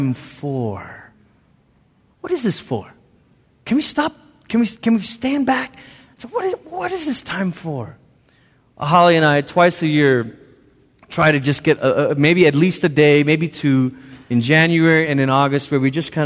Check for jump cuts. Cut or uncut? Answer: uncut